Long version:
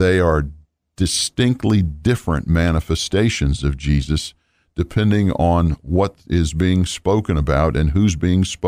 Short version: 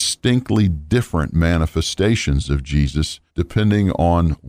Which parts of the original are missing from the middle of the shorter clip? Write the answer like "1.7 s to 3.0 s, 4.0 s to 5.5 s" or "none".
4.4 s to 4.7 s